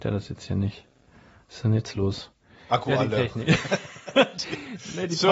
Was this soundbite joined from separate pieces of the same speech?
no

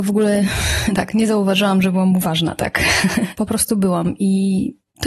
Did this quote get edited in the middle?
yes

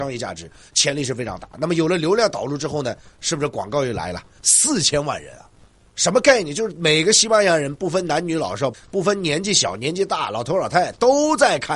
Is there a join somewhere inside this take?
yes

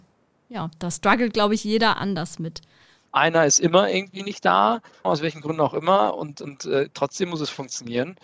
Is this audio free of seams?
no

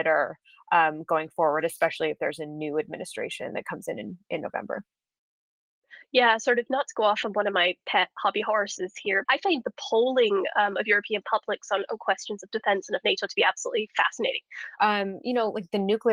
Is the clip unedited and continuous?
no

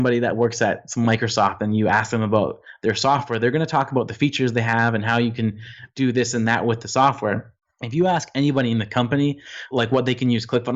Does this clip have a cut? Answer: no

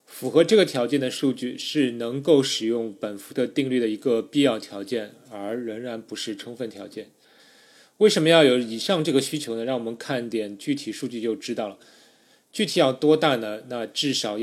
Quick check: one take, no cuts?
no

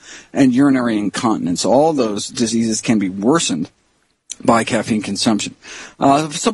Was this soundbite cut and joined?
no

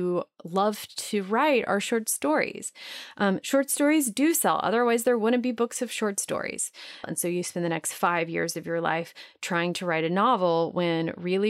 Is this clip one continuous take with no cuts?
no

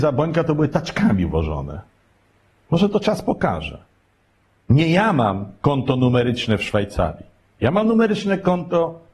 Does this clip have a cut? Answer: no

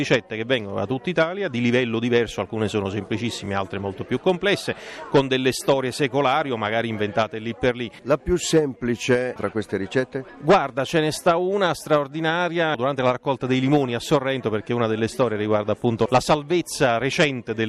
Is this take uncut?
yes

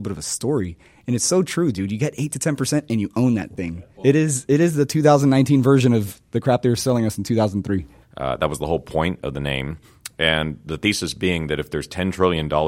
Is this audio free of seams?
no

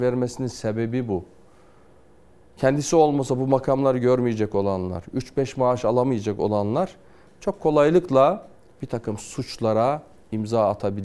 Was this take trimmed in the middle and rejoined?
no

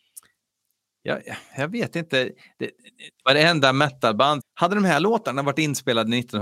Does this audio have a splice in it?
yes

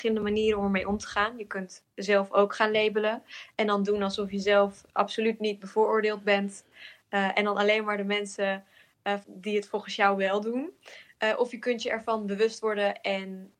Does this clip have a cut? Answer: yes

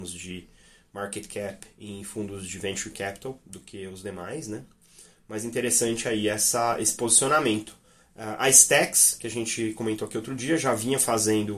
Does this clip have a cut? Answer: no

